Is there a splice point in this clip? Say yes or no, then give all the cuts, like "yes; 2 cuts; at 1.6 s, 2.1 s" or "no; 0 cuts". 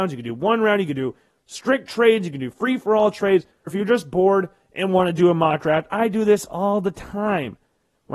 yes; 1 cut; at 3.7 s